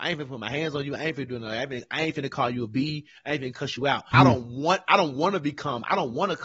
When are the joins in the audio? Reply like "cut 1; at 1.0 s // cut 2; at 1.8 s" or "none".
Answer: cut 1; at 4.1 s